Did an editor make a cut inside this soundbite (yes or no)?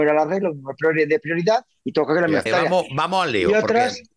yes